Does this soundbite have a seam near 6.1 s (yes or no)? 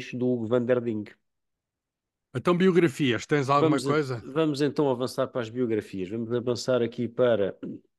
no